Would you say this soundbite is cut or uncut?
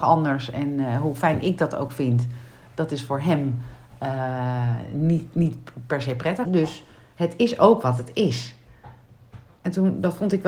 cut